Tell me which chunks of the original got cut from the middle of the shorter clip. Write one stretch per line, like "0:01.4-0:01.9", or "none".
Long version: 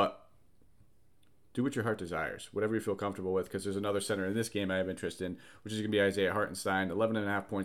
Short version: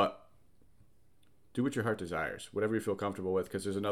none